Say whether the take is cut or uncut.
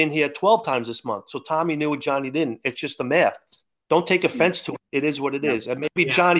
uncut